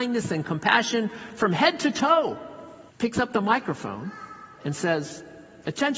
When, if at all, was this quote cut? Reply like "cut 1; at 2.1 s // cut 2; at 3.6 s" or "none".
cut 1; at 2.9 s